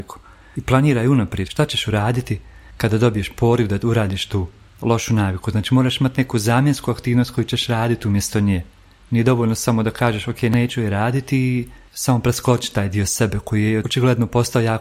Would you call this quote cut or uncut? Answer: uncut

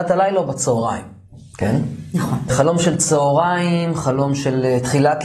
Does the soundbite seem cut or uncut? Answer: cut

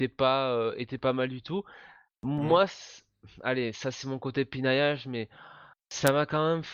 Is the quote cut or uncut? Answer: uncut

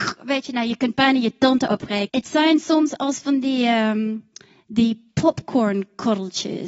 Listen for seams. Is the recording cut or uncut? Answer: cut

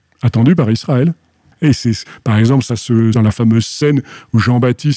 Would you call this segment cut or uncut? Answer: cut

